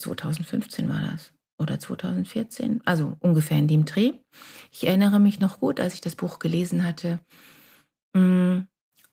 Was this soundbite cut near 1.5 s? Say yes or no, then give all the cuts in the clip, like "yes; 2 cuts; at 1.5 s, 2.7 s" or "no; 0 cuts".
no; 0 cuts